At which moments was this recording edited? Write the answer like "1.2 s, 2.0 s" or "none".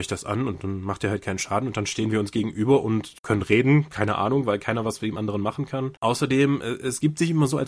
6.0 s